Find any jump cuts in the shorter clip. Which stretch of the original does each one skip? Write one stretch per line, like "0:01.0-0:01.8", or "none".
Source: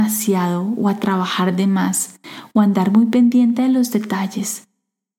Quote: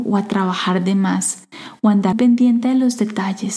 0:02.8-0:03.1